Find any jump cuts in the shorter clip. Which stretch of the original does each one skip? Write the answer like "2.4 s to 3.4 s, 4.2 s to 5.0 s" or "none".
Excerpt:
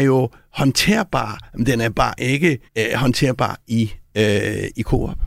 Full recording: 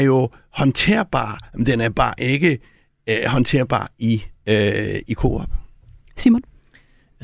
2.7 s to 3.0 s